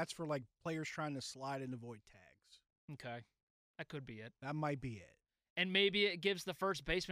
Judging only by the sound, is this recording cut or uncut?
uncut